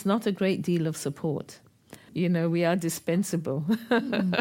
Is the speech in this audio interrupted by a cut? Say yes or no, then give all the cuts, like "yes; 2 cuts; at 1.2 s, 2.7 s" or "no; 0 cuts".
yes; 1 cut; at 2.1 s